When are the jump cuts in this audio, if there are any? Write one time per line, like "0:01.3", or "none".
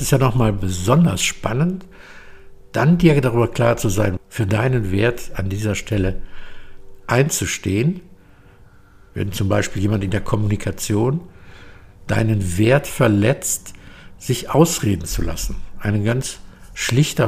0:04.2